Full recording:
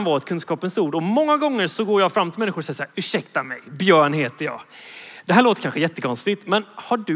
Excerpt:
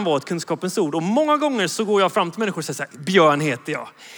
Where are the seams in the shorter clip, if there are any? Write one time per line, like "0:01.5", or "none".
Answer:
0:02.9